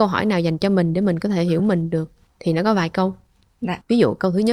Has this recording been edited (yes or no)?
no